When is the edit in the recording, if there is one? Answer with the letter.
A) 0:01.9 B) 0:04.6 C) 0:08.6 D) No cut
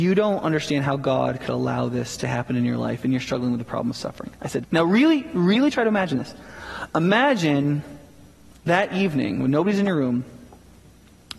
B